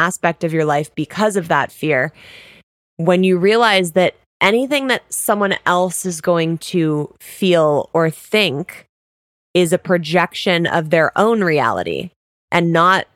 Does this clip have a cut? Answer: no; 0 cuts

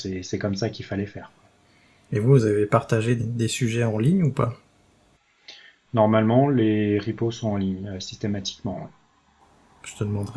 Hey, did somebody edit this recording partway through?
yes; 1 cut; at 3.2 s

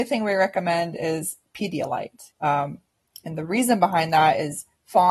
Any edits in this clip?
yes; 1 cut; at 2.3 s

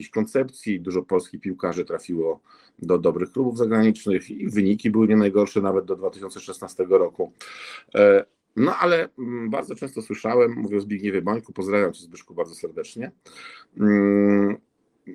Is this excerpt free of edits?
yes; 0 cuts

